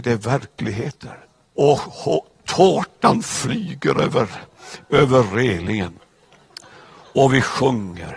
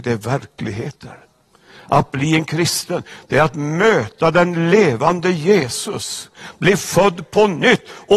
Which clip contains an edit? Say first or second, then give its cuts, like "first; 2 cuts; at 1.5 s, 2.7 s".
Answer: first; 1 cut; at 1.5 s